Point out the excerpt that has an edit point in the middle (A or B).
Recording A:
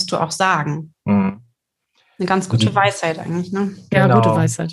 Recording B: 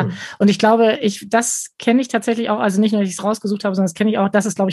A